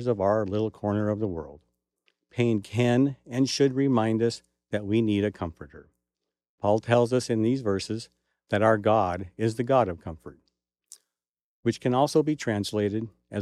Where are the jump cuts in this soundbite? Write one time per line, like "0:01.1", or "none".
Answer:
none

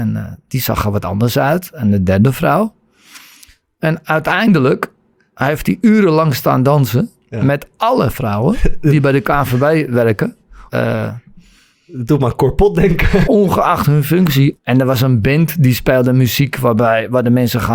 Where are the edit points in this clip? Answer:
0:10.7
0:13.2
0:14.6

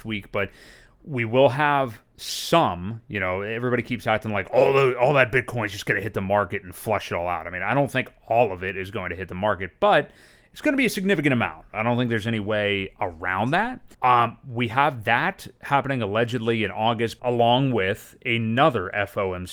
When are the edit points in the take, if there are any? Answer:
0:13.9
0:17.2

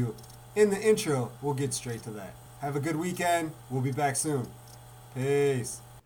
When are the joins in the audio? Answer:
0:01.3
0:03.6

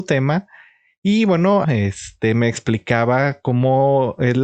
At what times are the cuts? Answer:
0:01.6

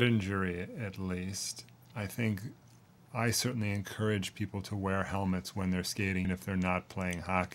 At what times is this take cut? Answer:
0:01.8
0:06.2

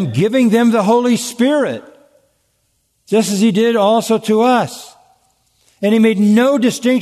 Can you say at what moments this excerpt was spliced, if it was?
none

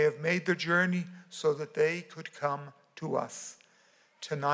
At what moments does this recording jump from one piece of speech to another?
none

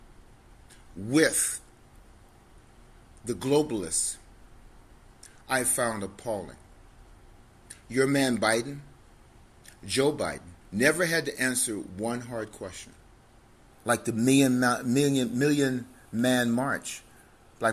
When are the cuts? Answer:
0:10.6
0:13.7

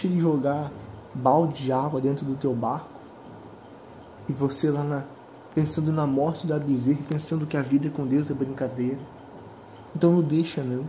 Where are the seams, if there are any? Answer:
0:05.5
0:09.9

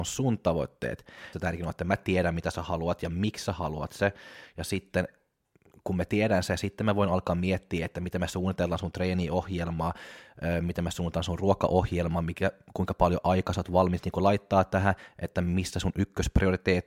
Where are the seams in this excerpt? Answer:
0:01.3

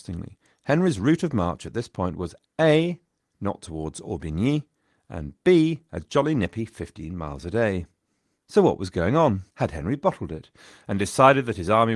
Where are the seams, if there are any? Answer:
0:08.4
0:09.5

